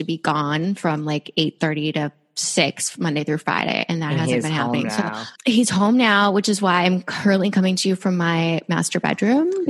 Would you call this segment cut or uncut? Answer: cut